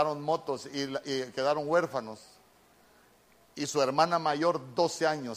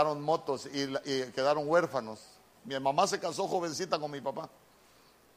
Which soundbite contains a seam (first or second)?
second